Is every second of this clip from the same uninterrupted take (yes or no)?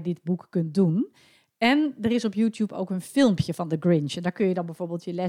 yes